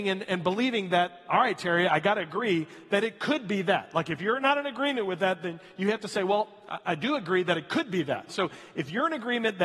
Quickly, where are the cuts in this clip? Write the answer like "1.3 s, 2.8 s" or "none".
none